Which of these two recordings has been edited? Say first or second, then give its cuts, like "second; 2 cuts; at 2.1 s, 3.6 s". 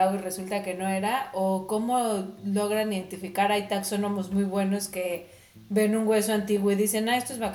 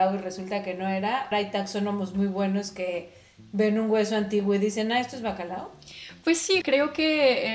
second; 2 cuts; at 1.3 s, 6.6 s